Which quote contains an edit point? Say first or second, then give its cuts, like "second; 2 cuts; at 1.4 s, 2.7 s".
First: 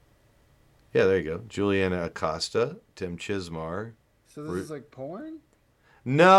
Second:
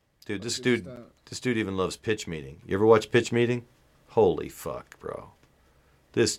second; 2 cuts; at 1.2 s, 3.9 s